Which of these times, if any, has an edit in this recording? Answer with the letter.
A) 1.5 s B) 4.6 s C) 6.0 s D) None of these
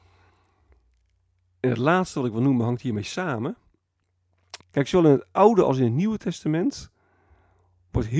B